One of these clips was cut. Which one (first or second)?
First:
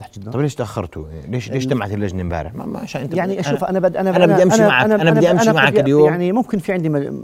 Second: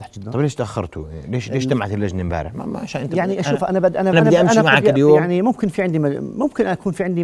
second